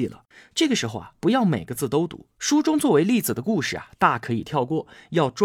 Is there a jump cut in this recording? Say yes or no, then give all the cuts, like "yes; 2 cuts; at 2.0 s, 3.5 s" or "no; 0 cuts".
no; 0 cuts